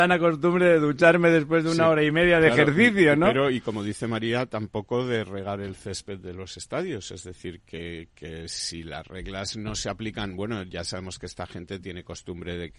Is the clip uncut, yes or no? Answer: yes